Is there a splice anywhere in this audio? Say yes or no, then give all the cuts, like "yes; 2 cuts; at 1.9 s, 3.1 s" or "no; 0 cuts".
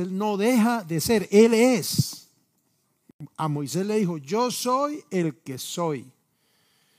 no; 0 cuts